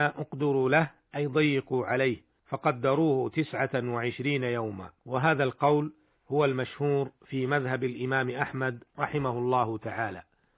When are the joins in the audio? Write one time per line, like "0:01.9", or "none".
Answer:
0:02.4
0:05.0